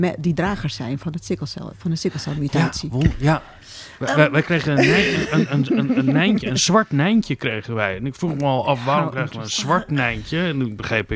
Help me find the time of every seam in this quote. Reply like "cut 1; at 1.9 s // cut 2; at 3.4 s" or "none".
none